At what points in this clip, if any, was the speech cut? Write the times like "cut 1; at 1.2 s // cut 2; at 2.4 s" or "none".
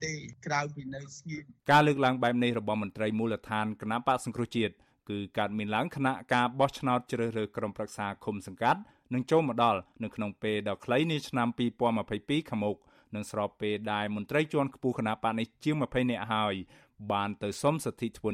cut 1; at 1.6 s